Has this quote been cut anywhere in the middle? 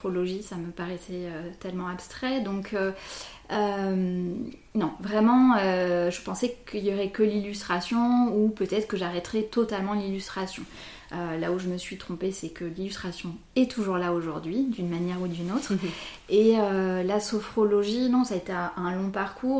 no; 0 cuts

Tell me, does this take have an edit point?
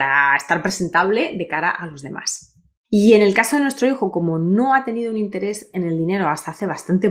yes; 1 cut; at 2.8 s

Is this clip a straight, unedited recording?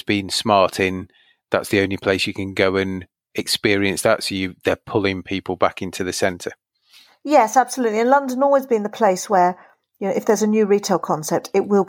yes; 0 cuts

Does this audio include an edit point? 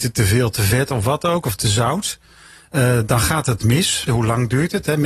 yes; 1 cut; at 4.1 s

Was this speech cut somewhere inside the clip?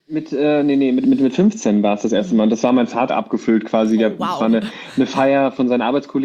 yes; 1 cut; at 3.1 s

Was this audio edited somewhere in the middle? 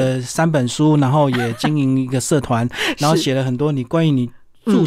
no; 0 cuts

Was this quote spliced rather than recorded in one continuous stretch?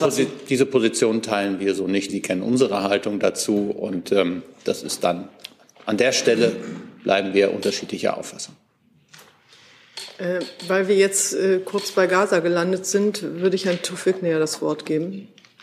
yes; 1 cut; at 2.1 s

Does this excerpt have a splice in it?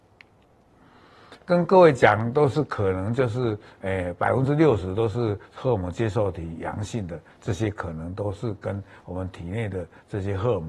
yes; 1 cut; at 1.4 s

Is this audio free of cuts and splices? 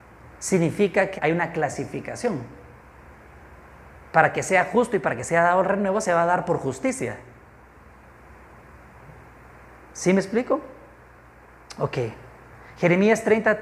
no; 1 cut; at 1.2 s

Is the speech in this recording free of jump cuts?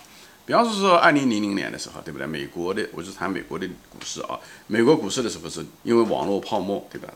no; 1 cut; at 5.8 s

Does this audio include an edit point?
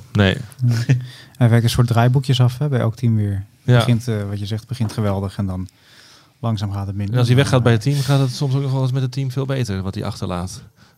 no; 0 cuts

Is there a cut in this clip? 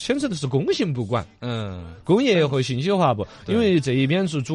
no; 0 cuts

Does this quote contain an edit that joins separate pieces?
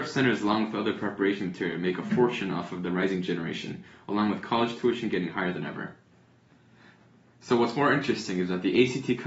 no; 0 cuts

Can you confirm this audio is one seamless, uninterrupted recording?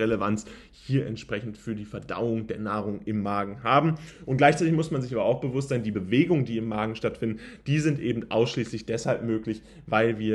yes; 0 cuts

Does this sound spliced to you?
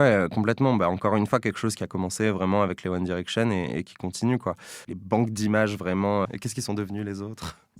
yes; 2 cuts; at 4.8 s, 6.3 s

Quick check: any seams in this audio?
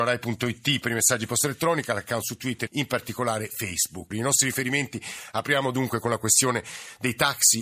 yes; 2 cuts; at 2.7 s, 4.1 s

